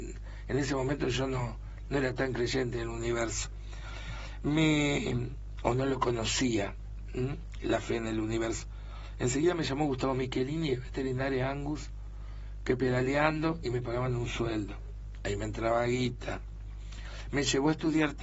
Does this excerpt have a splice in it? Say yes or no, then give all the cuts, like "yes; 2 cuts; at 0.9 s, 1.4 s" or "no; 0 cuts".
no; 0 cuts